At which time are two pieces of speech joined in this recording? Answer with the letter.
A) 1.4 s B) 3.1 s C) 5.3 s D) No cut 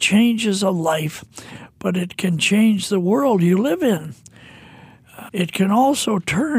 C